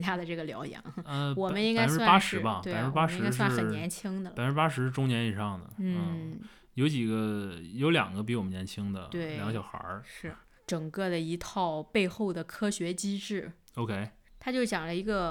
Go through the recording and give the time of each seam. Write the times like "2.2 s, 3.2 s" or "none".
10.6 s